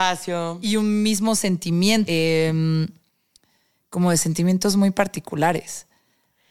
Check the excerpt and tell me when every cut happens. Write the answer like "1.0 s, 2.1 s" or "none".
2.1 s

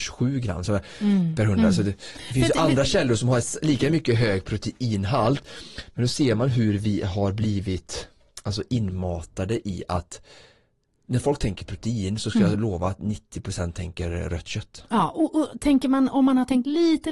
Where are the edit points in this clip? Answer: none

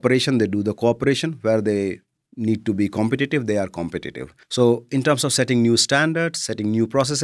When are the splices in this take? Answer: 4.4 s

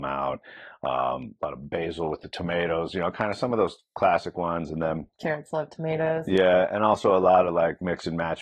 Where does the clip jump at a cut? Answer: 5.1 s

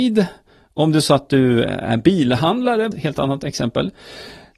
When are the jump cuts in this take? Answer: 2.9 s

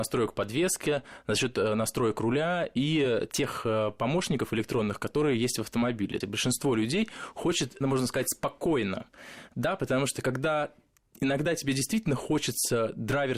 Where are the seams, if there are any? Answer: 6.2 s, 7.8 s

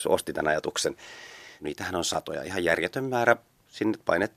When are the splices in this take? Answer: 1.6 s

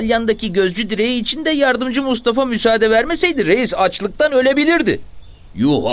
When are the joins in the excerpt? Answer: none

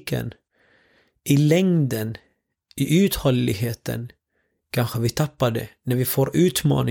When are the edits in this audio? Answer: none

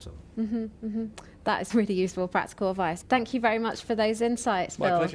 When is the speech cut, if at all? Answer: 1.7 s, 3.0 s

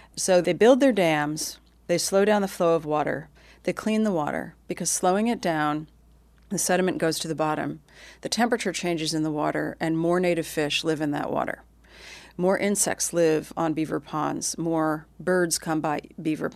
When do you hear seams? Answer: none

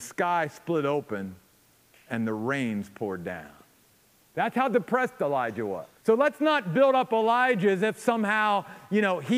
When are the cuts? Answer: 4.2 s, 6.0 s

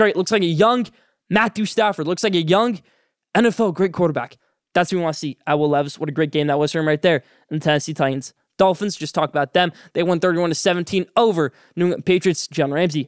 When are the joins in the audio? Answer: none

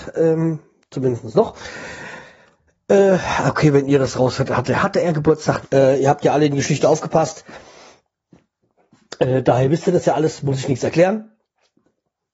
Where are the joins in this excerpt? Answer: 5.6 s

